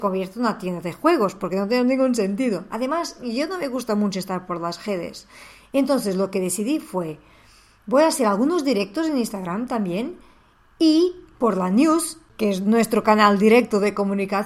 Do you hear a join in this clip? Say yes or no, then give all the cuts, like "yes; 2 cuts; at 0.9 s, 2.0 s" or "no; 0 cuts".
no; 0 cuts